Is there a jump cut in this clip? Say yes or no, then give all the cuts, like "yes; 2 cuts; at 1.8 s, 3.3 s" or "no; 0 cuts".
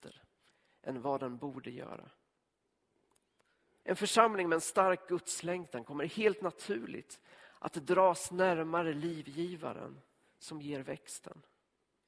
yes; 1 cut; at 3.8 s